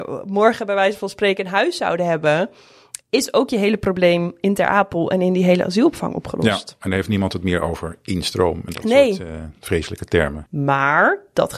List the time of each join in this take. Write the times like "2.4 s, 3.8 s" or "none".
10.5 s